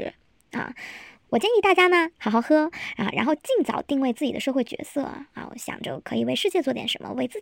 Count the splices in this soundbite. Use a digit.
1